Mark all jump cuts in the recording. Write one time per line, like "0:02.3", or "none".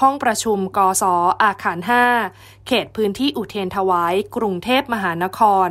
0:00.9